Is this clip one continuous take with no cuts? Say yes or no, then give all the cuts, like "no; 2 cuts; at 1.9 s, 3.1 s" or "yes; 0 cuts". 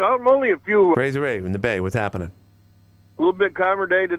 no; 1 cut; at 0.9 s